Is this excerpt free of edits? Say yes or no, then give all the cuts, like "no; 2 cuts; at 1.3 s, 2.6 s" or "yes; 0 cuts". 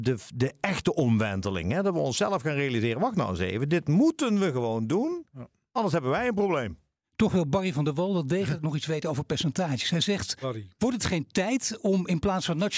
yes; 0 cuts